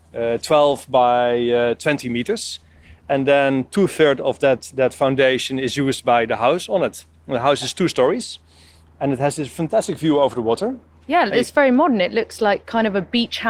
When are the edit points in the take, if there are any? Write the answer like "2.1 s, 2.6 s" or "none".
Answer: none